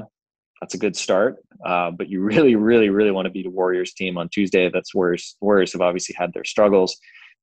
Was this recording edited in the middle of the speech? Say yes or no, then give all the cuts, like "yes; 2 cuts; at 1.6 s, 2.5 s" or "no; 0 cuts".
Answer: no; 0 cuts